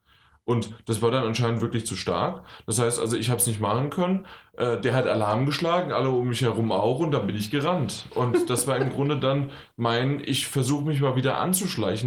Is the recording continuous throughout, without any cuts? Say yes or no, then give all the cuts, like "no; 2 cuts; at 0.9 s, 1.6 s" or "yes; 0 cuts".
yes; 0 cuts